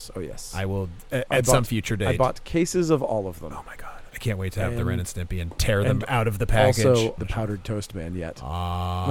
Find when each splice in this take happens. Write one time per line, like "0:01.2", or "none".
0:07.2